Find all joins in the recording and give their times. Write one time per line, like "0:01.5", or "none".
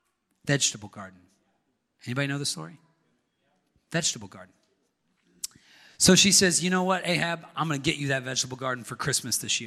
none